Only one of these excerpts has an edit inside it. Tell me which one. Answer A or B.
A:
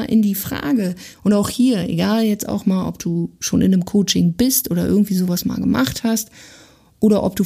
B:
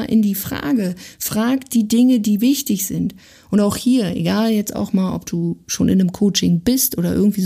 A